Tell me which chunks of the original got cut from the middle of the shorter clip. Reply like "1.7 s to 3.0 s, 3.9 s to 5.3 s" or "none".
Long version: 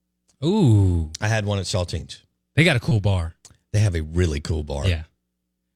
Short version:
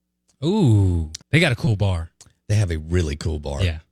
1.2 s to 2.4 s

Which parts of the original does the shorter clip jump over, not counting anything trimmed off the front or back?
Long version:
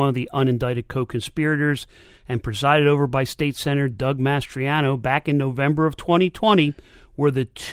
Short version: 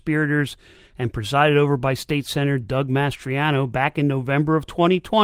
none

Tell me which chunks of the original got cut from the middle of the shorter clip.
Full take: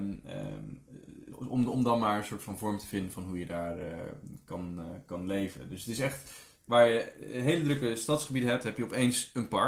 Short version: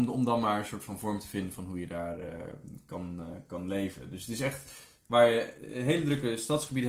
none

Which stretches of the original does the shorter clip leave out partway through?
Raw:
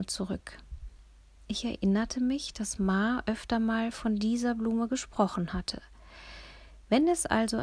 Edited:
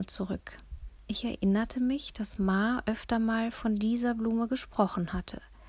1.0 s to 1.4 s

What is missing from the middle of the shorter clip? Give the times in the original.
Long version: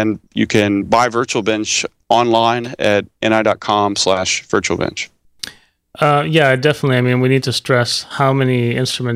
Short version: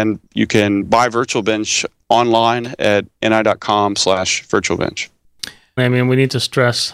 5.8 s to 6.9 s

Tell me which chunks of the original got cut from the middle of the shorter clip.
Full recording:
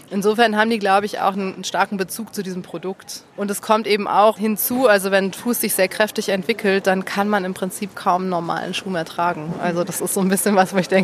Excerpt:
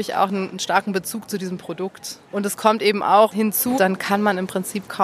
4.8 s to 6.8 s

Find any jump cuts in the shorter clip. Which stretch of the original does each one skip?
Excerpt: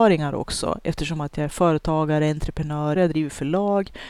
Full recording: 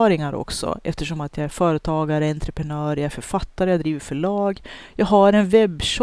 3.0 s to 3.7 s

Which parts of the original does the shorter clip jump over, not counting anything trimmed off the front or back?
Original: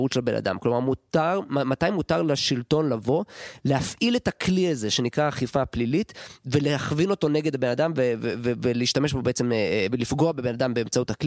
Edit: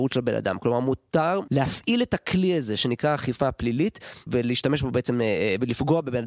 1.5 s to 3.6 s, 6.4 s to 8.6 s

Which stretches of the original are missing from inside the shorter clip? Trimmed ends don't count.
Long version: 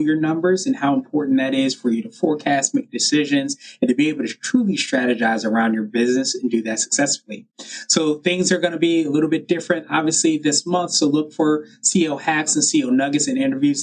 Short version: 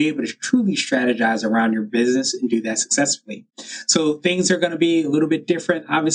none

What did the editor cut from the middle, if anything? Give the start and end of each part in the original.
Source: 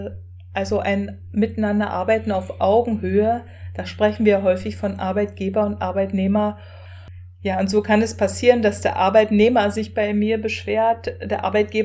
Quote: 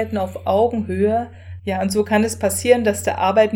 3.7 s to 7.4 s

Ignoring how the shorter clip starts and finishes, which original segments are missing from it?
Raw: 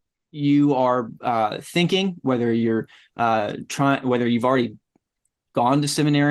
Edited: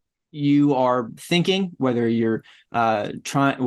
1.2 s to 1.6 s

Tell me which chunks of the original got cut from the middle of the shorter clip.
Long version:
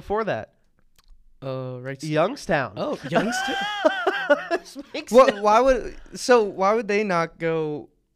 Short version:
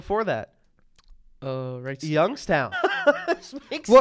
2.7 s to 3.9 s

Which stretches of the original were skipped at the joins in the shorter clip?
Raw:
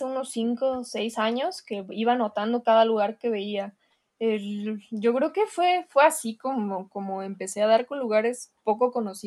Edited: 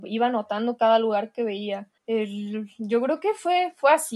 3.8 s to 4.1 s

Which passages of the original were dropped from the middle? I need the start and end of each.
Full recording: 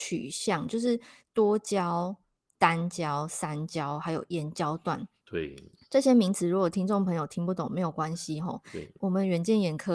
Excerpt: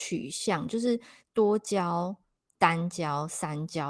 none

